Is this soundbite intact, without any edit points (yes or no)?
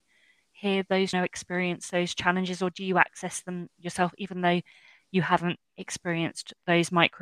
no